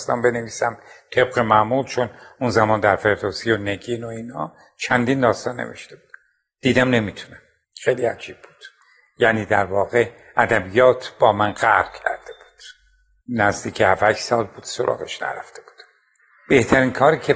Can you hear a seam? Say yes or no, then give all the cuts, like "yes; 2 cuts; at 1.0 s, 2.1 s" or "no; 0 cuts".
no; 0 cuts